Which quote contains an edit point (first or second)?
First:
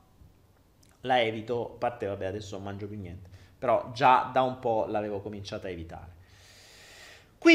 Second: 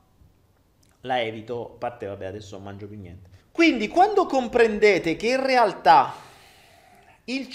second